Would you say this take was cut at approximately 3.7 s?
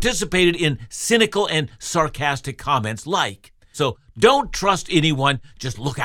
yes; 1 cut; at 3.7 s

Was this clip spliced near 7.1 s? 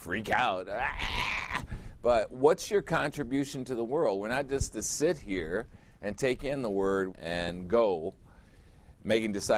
yes; 1 cut; at 7.1 s

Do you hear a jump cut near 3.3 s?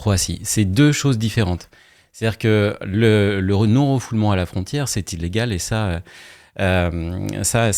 no; 0 cuts

